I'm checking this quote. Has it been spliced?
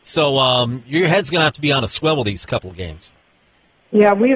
no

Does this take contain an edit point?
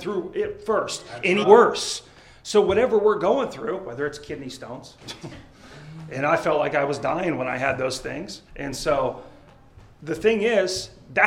yes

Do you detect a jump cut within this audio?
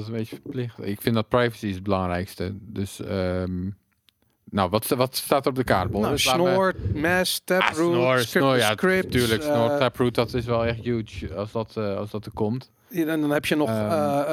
no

